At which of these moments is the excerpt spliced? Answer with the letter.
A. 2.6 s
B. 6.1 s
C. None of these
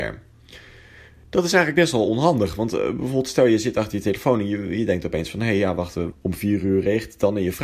B